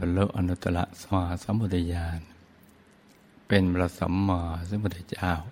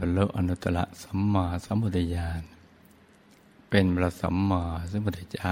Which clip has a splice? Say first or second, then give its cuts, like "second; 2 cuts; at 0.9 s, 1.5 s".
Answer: first; 1 cut; at 1.1 s